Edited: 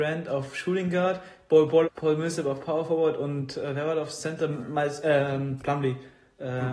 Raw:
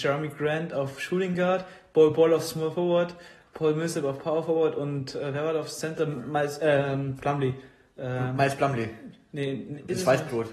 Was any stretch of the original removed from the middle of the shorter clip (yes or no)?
yes